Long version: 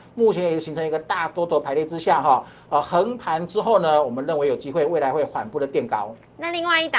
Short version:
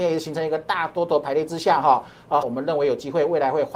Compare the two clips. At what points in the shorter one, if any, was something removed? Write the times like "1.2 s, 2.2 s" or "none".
2.4 s